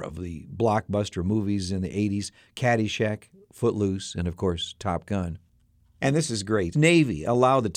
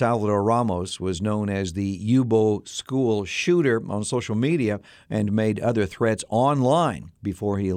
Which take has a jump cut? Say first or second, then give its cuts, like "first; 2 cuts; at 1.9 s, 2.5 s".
first; 1 cut; at 6.7 s